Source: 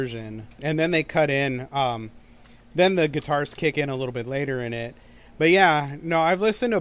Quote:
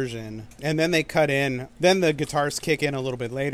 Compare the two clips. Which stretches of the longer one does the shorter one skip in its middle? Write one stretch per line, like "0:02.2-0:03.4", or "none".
0:01.7-0:02.6

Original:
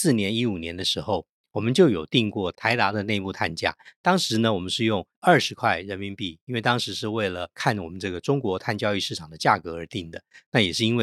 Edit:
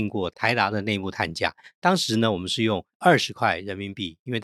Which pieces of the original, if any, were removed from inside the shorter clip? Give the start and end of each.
none

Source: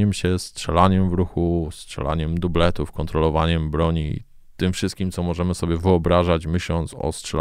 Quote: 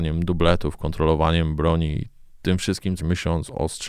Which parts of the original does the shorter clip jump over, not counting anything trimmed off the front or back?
0:05.1-0:06.4

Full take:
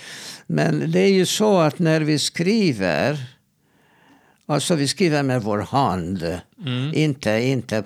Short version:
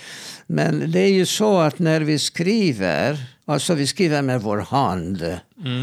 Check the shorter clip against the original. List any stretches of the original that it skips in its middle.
0:03.4-0:04.4

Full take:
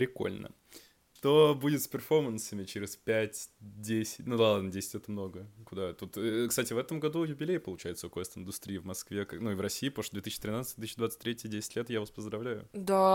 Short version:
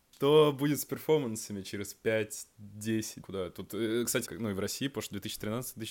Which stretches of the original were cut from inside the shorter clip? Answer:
0:04.2-0:05.6
0:06.7-0:09.3

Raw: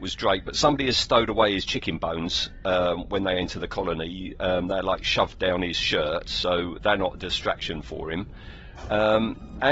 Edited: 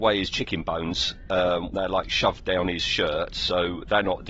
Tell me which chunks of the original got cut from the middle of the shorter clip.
0:03.1-0:04.7

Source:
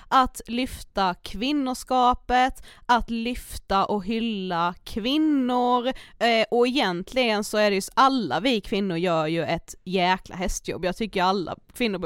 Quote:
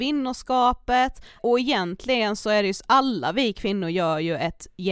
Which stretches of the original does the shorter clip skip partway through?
0:02.8-0:06.5

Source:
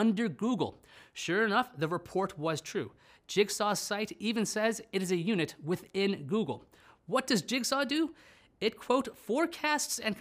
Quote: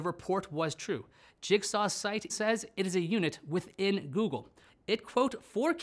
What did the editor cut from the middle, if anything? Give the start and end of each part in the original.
0:04.2-0:04.5
0:06.8-0:08.4

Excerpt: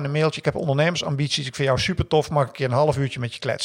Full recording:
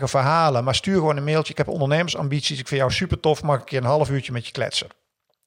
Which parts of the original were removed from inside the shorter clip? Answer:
none

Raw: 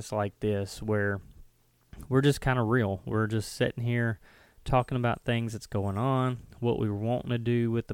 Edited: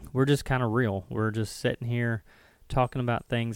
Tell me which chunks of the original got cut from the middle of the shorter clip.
none

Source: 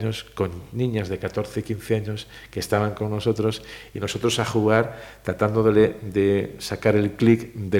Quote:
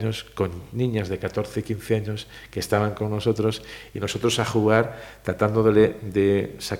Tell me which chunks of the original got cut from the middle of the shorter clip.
none

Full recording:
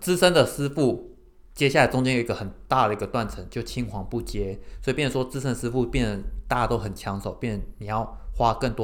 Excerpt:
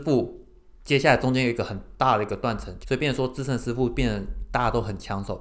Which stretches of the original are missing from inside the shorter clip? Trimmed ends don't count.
0:03.5-0:04.8

